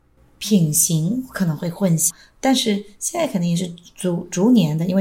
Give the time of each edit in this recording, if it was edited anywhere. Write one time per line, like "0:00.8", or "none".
0:02.1